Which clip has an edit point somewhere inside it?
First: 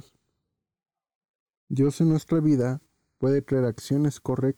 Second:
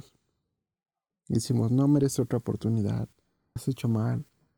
second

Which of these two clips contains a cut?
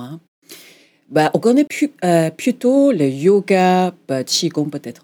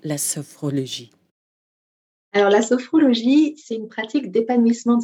first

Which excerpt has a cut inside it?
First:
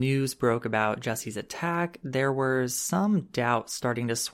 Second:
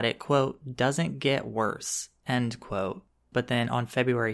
second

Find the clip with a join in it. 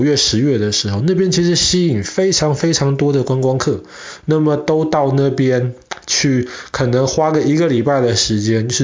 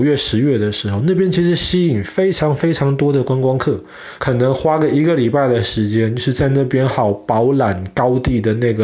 second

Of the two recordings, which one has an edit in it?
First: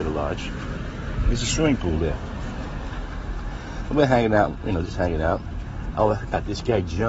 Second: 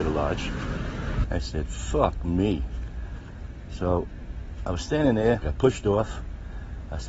second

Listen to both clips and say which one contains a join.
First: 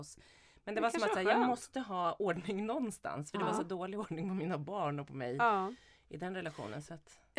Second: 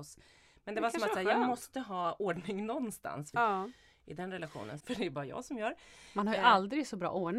second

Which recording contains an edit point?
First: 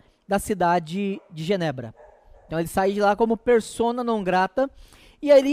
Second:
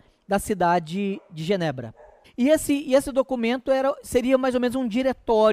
second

